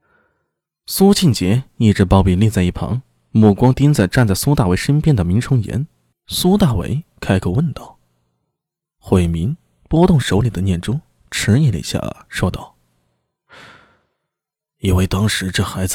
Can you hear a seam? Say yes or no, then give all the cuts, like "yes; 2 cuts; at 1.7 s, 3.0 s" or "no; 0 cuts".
yes; 1 cut; at 6.1 s